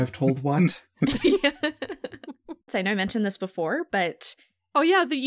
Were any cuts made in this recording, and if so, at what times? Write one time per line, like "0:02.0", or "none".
0:02.7